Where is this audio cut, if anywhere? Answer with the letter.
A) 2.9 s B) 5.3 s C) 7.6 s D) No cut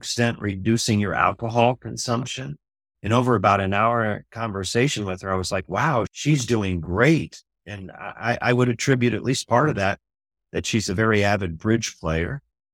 A